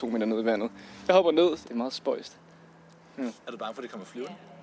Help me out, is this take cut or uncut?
cut